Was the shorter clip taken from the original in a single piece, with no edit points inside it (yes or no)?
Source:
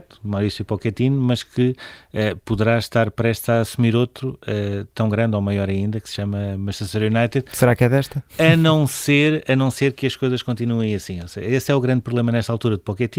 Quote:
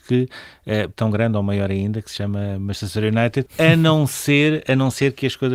no